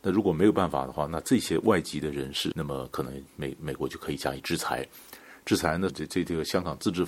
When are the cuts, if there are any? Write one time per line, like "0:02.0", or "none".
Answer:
0:02.5
0:05.9